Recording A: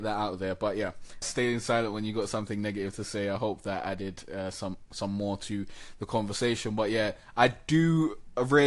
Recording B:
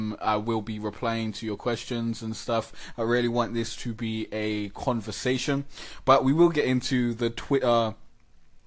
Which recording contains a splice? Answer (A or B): A